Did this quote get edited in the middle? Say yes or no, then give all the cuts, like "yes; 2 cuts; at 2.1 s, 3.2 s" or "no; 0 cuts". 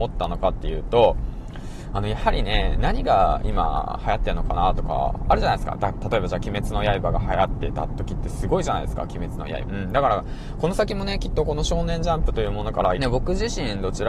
yes; 2 cuts; at 9.6 s, 13.0 s